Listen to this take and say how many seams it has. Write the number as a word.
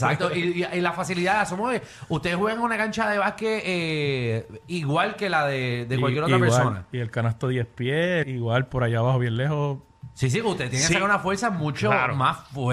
one